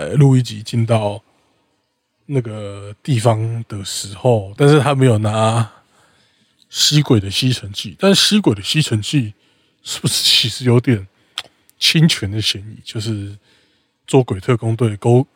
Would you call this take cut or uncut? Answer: cut